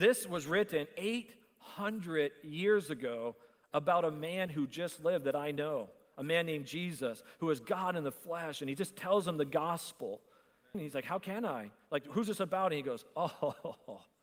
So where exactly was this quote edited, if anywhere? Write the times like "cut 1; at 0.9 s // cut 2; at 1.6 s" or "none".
cut 1; at 10.7 s